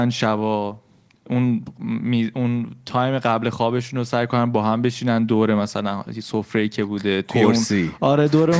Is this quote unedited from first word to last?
yes; 0 cuts

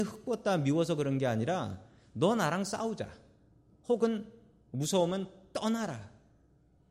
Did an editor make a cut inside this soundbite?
no; 0 cuts

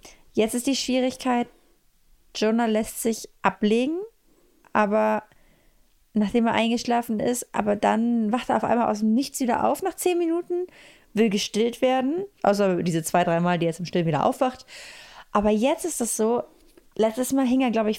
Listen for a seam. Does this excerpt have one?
yes; 1 cut; at 12.4 s

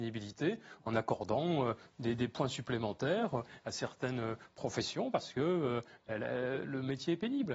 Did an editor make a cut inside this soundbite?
no; 0 cuts

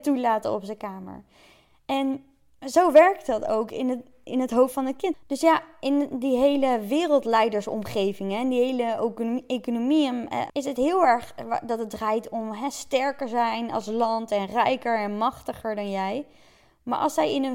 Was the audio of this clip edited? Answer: yes; 2 cuts; at 5.1 s, 10.5 s

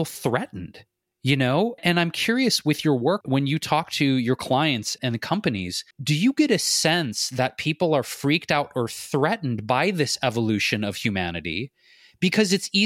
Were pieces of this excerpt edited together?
yes; 2 cuts; at 3.2 s, 5.9 s

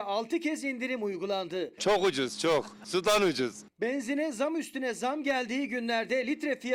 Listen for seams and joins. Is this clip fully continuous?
no; 1 cut; at 1.8 s

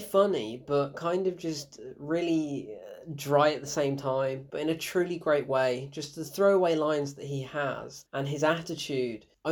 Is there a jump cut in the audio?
no; 0 cuts

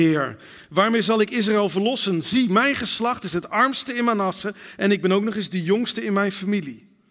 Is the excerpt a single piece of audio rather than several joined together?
yes; 0 cuts

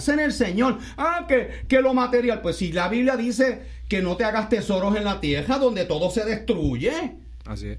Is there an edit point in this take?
no; 0 cuts

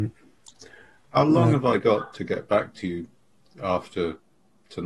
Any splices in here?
no; 0 cuts

